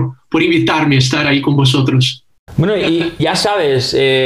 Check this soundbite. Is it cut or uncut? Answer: cut